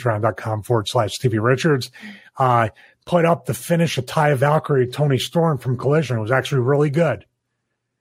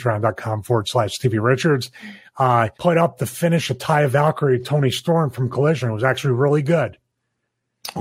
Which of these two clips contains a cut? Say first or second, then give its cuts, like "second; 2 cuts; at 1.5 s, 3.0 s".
second; 1 cut; at 2.7 s